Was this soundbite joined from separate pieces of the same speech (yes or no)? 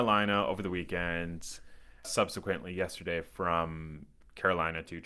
yes